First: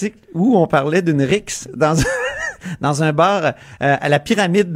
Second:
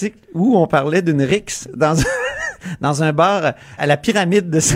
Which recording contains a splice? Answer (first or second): second